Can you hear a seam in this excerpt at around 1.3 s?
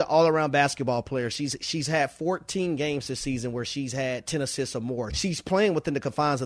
no; 1 cut; at 5.1 s

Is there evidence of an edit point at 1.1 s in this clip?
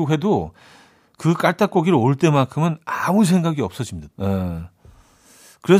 no; 1 cut; at 4.1 s

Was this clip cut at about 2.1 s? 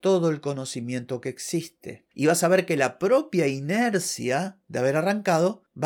yes; 1 cut; at 2.1 s

